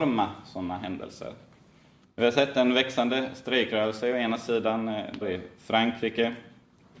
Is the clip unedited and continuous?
no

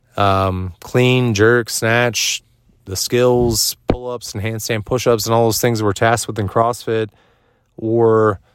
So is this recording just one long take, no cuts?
yes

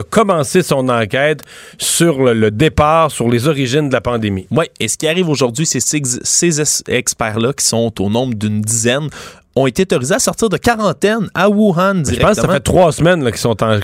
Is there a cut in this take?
no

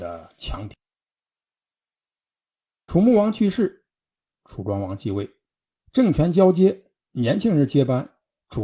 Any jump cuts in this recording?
no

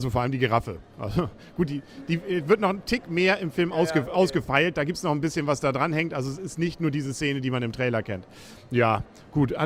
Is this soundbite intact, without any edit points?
yes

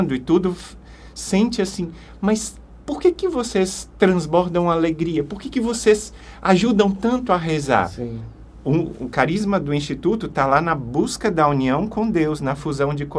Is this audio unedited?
yes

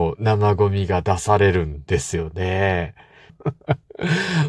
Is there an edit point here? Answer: yes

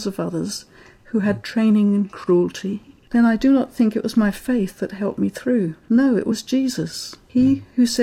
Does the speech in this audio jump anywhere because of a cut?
no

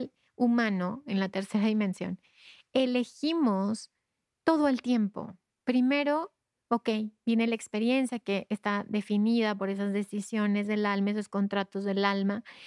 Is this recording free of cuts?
yes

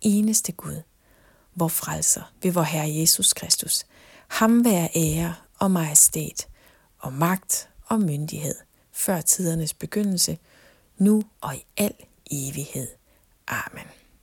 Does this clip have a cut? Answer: no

